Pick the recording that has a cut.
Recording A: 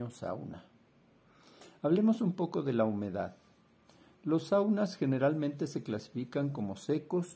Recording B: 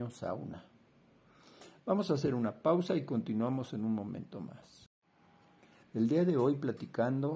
B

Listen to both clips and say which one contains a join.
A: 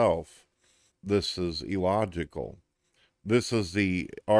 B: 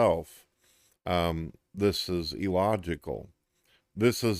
A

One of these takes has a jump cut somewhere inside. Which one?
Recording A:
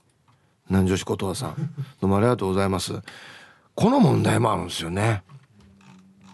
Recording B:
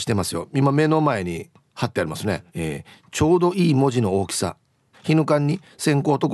B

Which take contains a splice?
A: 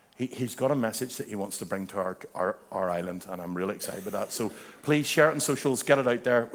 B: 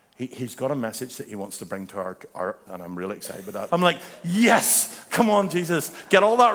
B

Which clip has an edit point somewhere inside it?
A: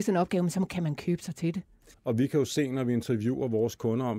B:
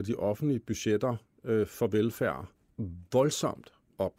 A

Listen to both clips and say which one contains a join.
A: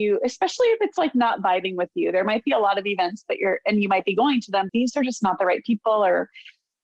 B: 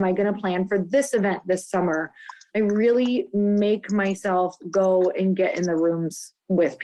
A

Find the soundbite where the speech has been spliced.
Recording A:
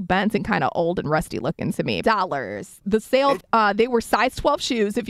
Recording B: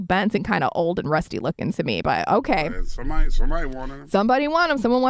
A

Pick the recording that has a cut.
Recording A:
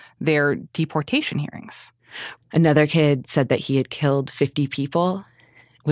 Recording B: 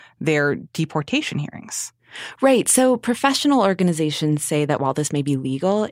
A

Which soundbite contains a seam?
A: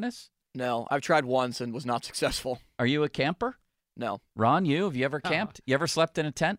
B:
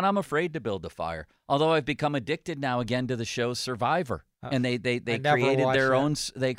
B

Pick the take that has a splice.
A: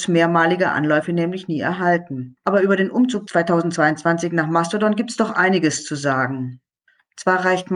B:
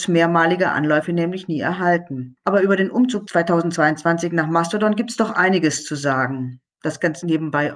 B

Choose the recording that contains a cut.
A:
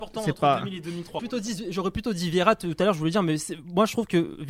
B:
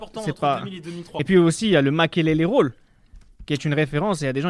A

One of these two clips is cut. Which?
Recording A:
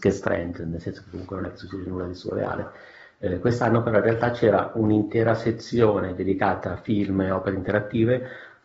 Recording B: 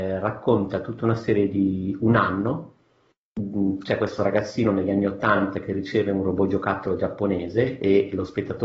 A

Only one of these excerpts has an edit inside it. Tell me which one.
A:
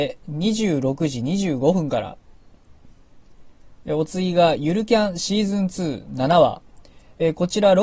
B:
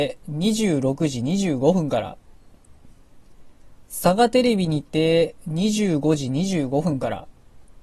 A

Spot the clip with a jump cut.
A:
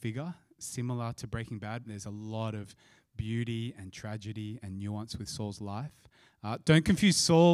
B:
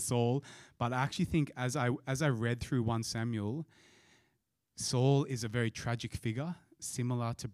A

